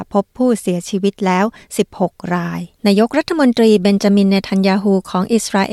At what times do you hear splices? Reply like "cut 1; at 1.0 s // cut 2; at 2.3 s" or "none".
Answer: cut 1; at 2.7 s